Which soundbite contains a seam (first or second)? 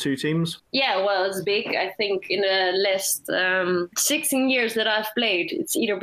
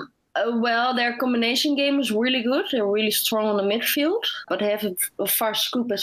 second